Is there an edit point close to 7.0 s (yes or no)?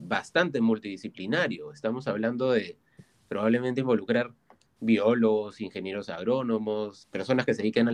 yes